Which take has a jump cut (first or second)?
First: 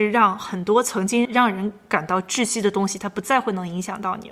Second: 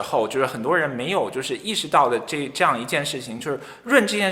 first